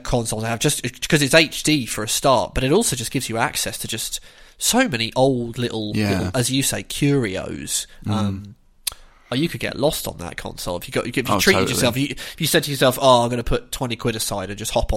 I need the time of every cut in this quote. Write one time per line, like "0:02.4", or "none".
none